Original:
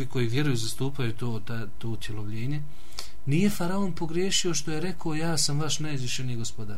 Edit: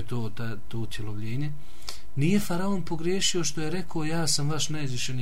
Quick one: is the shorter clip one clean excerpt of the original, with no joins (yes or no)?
yes